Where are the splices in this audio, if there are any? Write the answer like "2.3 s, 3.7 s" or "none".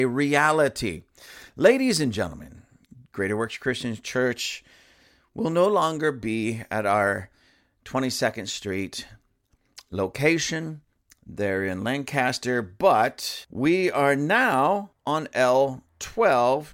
none

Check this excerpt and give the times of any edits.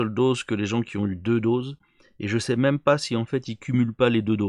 none

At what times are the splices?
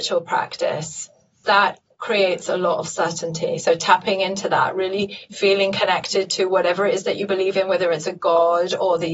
none

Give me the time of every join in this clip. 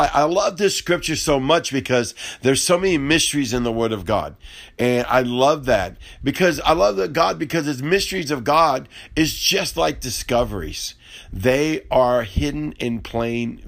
none

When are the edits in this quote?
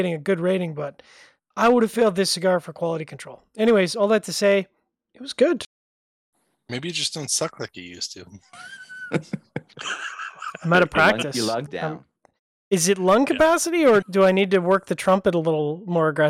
11.7 s, 14.0 s

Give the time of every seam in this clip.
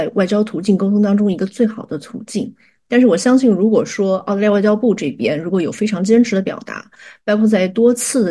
none

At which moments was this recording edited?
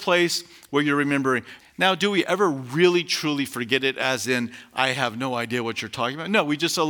1.6 s

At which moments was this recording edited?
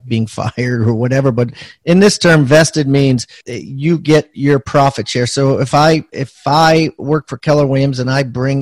3.4 s

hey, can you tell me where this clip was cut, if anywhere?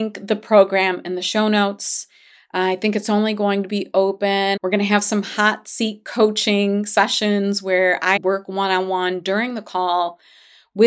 4.6 s, 8.2 s

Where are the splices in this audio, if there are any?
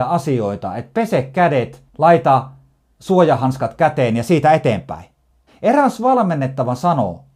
1.9 s, 5.5 s

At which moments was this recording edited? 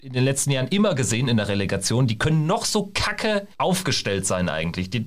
3.5 s

